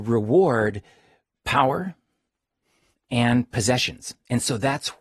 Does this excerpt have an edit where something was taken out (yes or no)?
yes